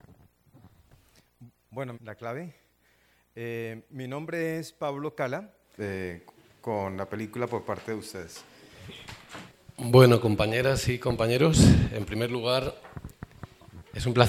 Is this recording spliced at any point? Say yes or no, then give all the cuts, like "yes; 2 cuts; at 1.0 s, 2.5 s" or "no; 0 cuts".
yes; 2 cuts; at 1.9 s, 5.8 s